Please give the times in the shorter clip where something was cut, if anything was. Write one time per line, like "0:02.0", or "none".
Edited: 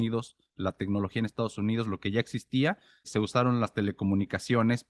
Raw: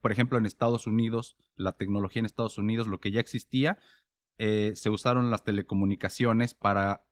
0:03.0

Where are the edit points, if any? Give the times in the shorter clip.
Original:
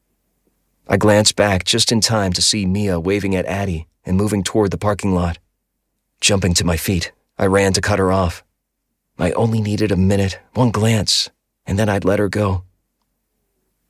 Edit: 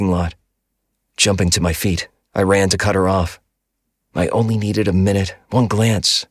none

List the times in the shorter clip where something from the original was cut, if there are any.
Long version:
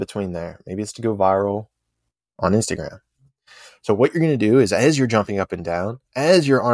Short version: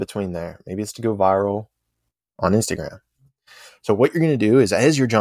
none

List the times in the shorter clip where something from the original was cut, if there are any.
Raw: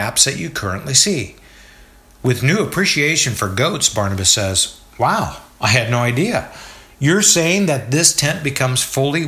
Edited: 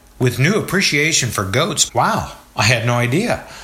0:01.9

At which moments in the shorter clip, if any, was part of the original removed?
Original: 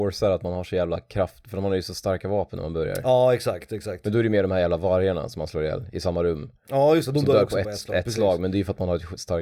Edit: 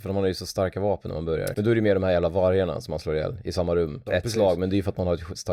0:01.5
0:04.1

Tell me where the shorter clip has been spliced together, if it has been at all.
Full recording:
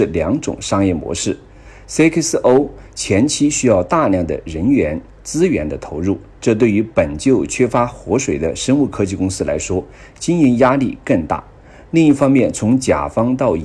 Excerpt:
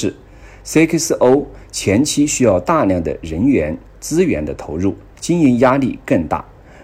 0:05.1

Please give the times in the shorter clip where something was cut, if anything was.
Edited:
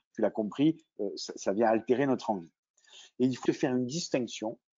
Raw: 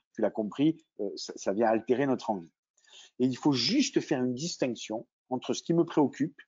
0:03.5

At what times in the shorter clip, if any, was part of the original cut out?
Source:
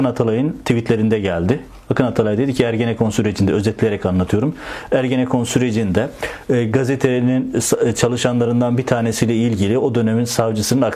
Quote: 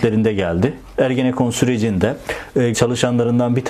0:00.9
0:02.7

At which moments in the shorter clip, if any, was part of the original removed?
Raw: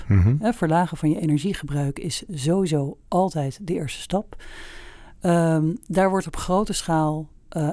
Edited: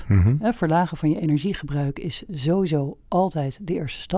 none

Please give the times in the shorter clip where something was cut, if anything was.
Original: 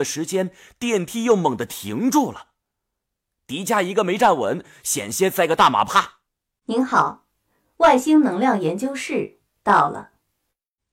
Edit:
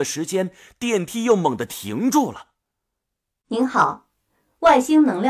0:03.3

